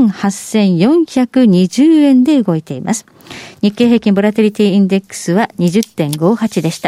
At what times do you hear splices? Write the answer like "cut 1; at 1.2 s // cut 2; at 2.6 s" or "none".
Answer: none

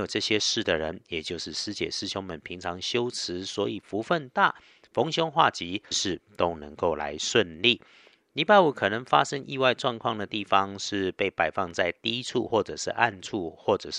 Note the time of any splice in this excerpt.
cut 1; at 5.9 s

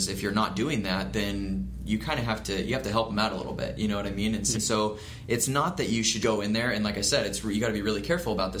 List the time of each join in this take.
cut 1; at 4.5 s // cut 2; at 6.2 s

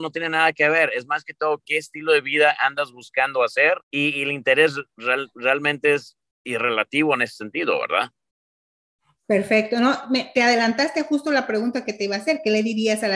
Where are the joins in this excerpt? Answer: cut 1; at 3.8 s

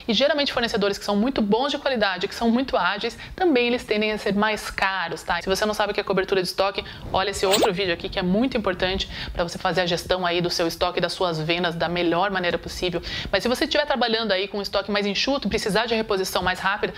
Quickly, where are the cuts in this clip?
cut 1; at 5.4 s

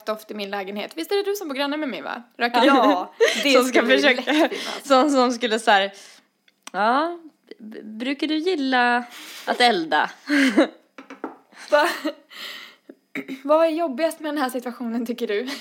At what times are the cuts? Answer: cut 1; at 2.6 s // cut 2; at 11.7 s

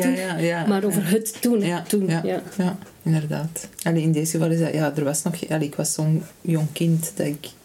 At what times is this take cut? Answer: cut 1; at 1.6 s // cut 2; at 3.7 s

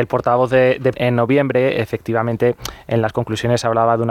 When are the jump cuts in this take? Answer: cut 1; at 0.9 s

